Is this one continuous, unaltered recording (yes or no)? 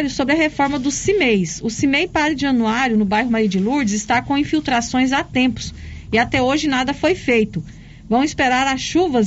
yes